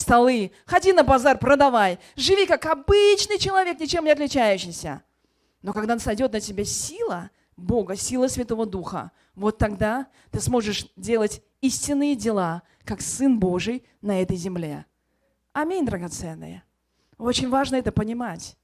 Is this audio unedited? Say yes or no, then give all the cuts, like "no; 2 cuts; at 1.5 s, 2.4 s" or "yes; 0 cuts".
yes; 0 cuts